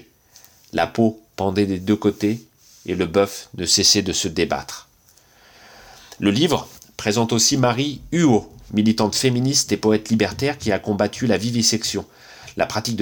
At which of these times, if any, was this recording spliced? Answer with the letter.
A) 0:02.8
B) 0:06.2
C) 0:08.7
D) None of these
C